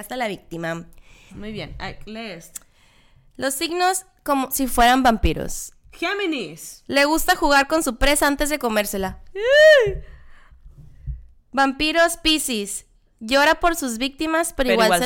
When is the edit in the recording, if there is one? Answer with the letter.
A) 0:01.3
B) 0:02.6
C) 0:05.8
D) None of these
A